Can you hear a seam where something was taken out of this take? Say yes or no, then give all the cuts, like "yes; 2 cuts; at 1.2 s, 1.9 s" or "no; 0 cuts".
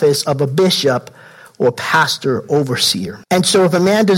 yes; 1 cut; at 3.2 s